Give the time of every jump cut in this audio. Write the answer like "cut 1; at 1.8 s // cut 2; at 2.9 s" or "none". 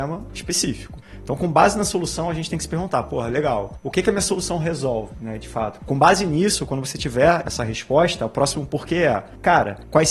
cut 1; at 5.8 s // cut 2; at 7.4 s

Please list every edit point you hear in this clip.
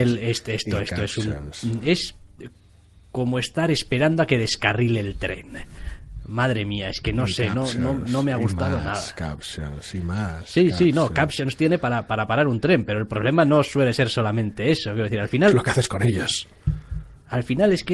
none

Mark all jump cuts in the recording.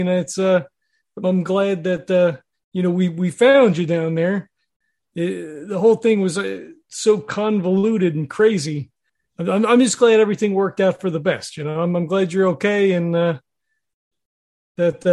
cut 1; at 1.2 s

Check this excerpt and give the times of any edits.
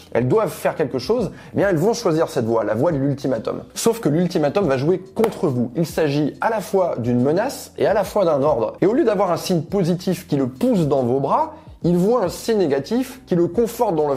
cut 1; at 8.8 s

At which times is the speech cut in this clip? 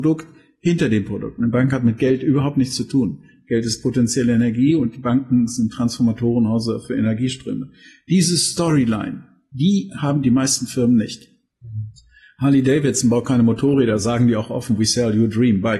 none

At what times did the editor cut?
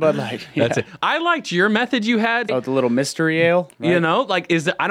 cut 1; at 2.5 s // cut 2; at 3.7 s

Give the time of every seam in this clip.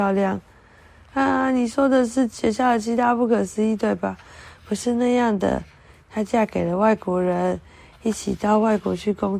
cut 1; at 1.1 s

